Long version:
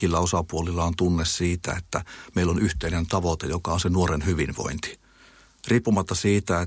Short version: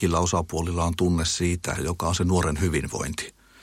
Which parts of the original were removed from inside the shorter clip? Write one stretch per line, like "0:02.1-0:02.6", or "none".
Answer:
0:01.7-0:03.4